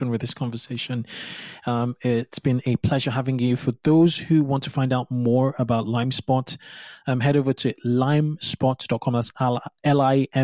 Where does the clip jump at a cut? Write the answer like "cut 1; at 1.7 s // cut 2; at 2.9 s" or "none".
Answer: none